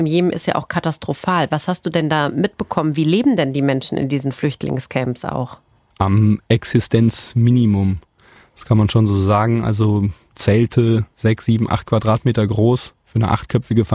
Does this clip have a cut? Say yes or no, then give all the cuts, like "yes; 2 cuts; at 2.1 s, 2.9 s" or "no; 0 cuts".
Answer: no; 0 cuts